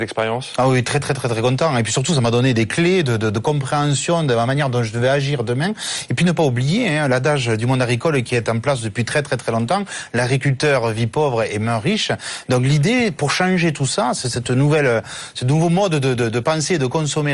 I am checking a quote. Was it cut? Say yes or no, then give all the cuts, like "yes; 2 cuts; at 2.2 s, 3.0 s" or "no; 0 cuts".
no; 0 cuts